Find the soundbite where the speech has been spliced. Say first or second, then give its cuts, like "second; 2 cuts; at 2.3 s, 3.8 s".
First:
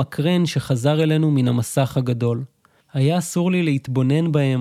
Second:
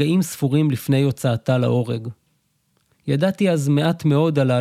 first; 1 cut; at 2.8 s